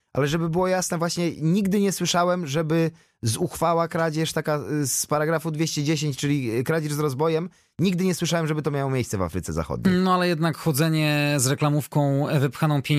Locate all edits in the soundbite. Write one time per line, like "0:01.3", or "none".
none